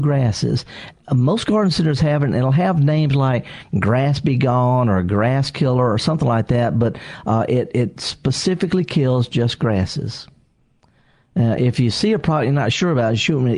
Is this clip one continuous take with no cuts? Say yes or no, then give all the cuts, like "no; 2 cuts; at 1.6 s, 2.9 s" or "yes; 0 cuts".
yes; 0 cuts